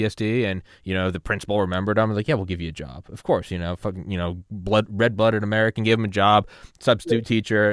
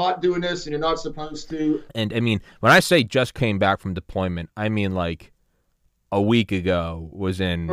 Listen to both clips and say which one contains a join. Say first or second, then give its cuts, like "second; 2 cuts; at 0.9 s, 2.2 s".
second; 1 cut; at 1.9 s